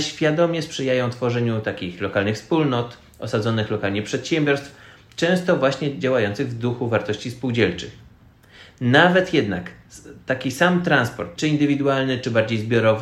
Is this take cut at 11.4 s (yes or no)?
yes